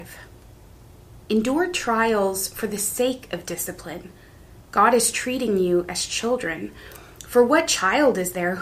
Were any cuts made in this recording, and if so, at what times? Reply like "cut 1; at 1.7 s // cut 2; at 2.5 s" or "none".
cut 1; at 1.2 s

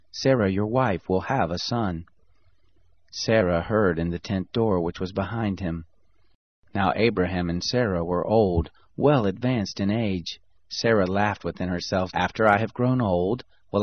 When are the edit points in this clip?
cut 1; at 10.5 s // cut 2; at 12.1 s

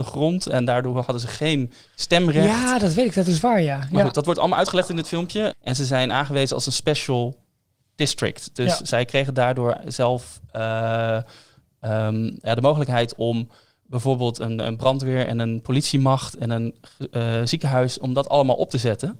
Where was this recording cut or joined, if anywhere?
cut 1; at 5.5 s

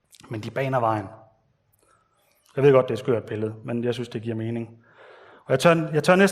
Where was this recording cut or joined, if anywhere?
none

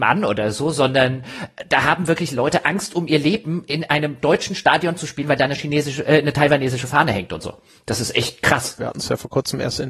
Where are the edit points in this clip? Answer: cut 1; at 8.8 s

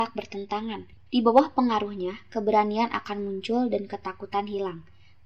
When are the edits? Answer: cut 1; at 1.0 s

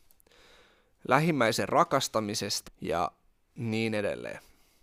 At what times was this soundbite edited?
cut 1; at 2.7 s

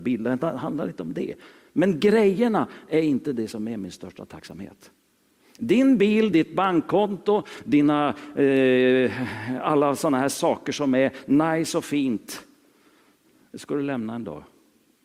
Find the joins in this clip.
none

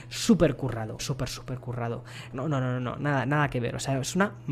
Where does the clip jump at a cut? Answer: cut 1; at 1.0 s // cut 2; at 2.3 s

